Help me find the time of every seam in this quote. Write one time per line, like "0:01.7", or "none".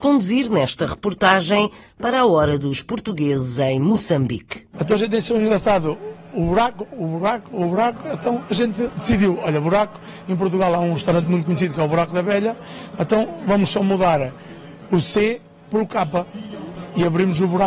0:04.7